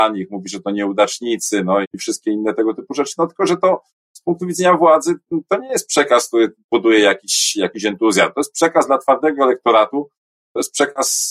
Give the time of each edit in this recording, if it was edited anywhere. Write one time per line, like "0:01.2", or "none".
0:01.8